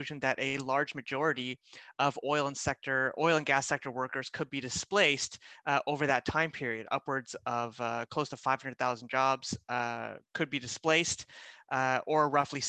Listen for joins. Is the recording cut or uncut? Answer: uncut